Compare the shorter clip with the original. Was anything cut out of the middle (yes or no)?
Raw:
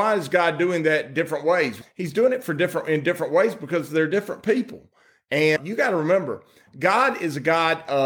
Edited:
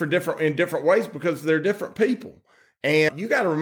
no